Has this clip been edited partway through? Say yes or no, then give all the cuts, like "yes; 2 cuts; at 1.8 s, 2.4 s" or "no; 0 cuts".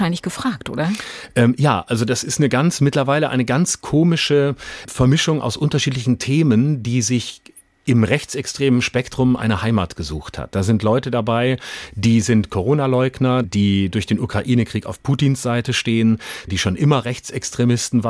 yes; 2 cuts; at 13.4 s, 16.5 s